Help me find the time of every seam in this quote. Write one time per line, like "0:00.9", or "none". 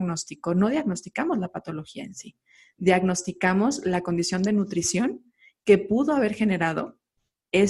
none